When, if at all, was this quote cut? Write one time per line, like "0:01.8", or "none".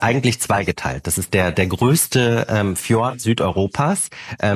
none